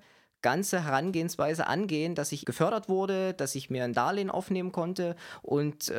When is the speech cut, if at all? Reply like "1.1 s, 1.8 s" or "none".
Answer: 2.4 s